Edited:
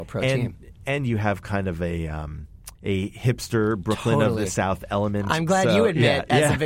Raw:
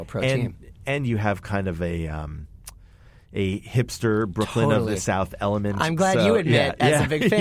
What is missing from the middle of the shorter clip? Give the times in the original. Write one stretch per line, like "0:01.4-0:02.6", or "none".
0:02.8-0:03.3